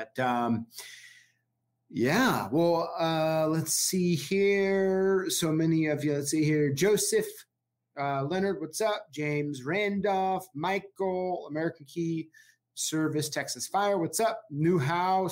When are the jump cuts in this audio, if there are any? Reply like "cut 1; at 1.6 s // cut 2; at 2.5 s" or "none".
none